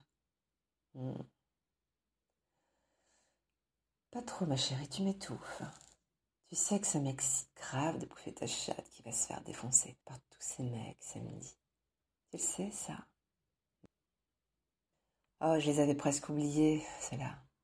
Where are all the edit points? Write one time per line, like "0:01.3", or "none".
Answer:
none

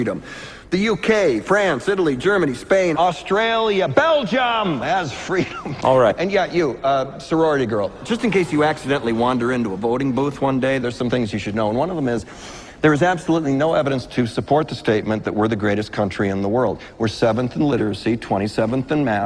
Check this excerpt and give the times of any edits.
0:05.8

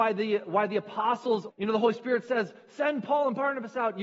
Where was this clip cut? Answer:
0:01.5

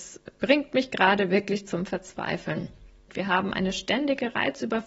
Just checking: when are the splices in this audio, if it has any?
0:03.1

